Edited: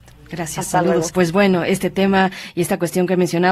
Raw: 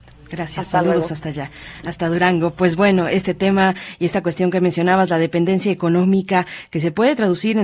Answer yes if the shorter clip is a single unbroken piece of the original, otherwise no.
no